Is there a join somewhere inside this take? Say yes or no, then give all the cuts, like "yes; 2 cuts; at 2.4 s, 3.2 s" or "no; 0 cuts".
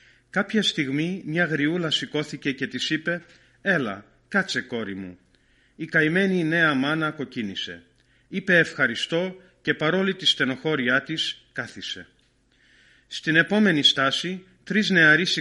no; 0 cuts